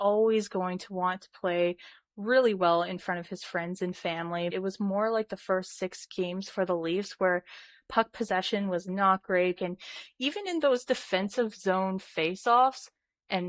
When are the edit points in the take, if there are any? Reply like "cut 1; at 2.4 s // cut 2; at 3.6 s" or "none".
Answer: cut 1; at 4.5 s // cut 2; at 9.6 s

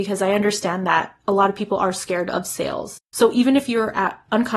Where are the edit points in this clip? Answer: none

